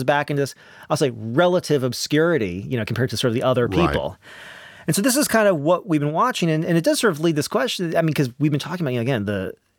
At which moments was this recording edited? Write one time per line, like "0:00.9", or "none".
none